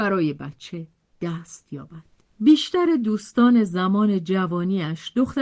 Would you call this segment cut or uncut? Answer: uncut